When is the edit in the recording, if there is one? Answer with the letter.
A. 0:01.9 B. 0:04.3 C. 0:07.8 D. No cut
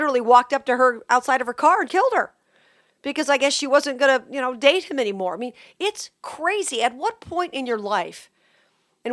A